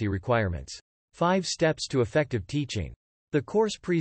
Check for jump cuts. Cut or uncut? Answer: cut